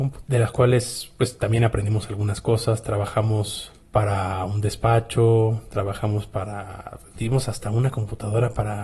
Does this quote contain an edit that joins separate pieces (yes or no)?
no